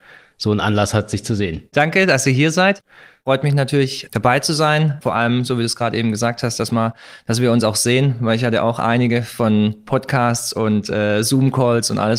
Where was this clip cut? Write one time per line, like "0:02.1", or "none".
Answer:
none